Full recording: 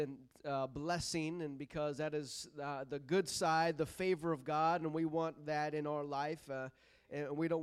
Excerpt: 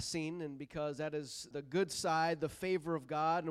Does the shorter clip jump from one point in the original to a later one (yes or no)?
yes